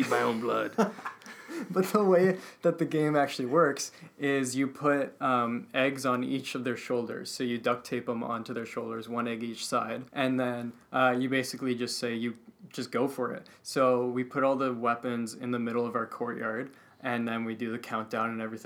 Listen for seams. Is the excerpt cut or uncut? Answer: cut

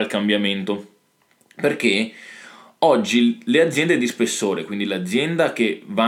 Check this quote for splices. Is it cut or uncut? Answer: uncut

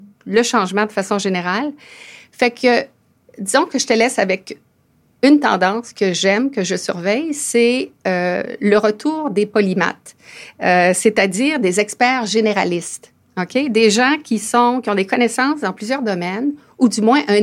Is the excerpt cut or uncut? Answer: uncut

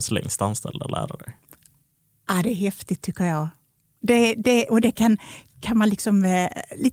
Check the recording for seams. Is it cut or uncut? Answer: uncut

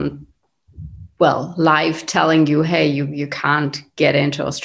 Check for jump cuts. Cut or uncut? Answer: uncut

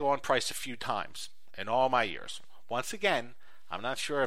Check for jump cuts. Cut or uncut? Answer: uncut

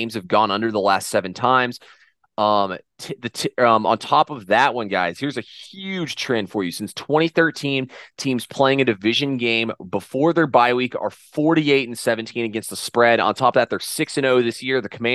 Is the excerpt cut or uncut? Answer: uncut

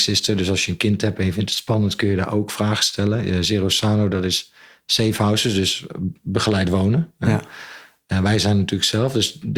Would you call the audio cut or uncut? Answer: uncut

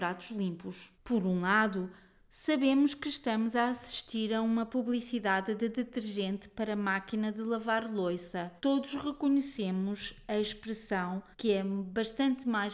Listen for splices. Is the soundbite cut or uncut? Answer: cut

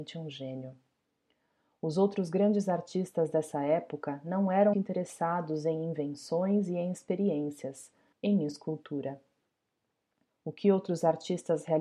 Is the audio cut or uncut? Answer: cut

